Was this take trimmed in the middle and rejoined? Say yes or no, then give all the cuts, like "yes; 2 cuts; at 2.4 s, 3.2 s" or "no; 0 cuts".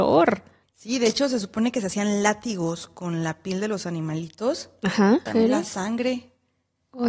yes; 1 cut; at 5.3 s